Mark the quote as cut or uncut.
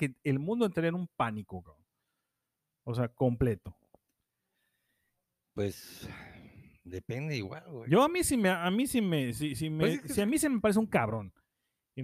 uncut